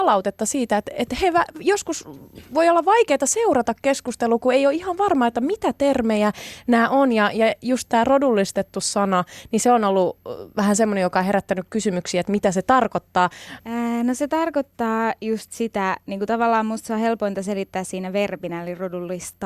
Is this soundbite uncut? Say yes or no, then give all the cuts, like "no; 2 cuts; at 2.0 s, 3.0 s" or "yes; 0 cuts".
no; 1 cut; at 13.6 s